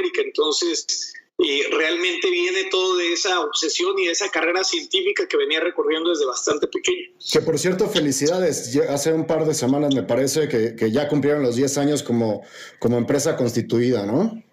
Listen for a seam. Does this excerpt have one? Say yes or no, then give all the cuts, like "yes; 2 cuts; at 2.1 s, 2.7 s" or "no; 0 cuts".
no; 0 cuts